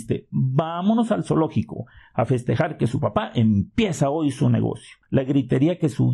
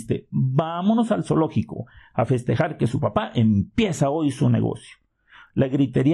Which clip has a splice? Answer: first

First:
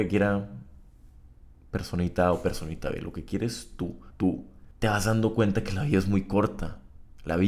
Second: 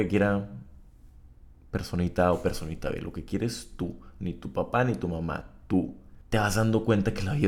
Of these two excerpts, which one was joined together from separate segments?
first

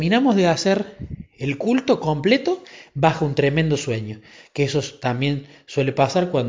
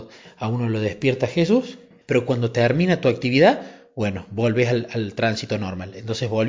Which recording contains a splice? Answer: second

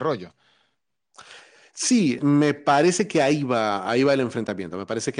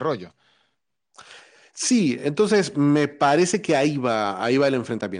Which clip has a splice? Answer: first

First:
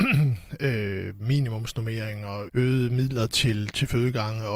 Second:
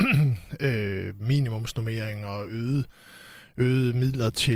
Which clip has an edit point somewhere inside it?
first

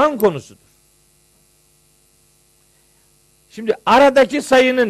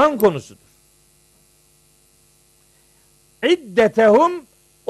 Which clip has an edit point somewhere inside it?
second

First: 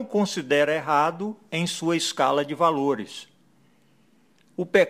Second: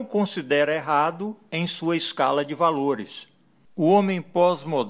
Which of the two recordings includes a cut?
second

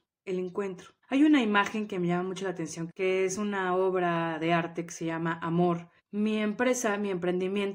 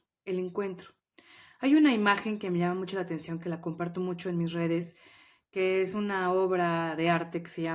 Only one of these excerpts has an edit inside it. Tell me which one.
first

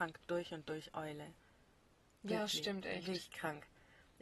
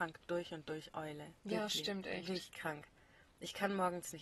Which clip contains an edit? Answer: second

